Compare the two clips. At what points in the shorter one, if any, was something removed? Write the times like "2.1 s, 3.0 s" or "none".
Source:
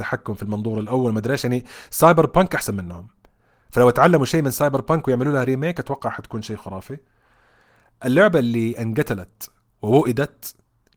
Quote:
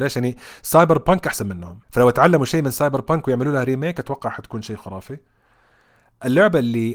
1.8 s